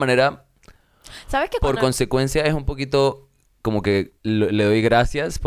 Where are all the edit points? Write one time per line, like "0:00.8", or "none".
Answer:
0:04.2